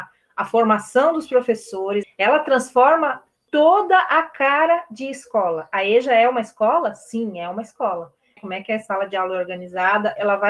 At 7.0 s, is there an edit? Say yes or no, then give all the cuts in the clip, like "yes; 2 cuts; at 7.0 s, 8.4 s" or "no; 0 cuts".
no; 2 cuts; at 2.0 s, 8.4 s